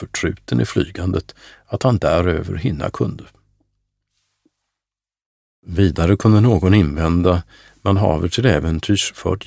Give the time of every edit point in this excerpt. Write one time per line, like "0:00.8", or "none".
none